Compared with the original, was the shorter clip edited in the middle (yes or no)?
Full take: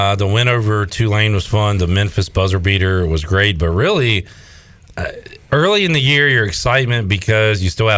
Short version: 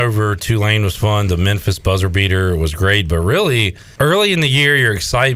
yes